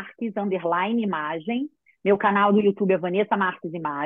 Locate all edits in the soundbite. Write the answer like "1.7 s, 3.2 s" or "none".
none